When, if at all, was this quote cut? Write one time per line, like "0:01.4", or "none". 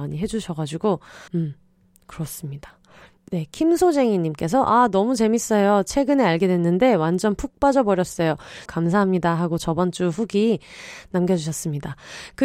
0:01.3
0:08.7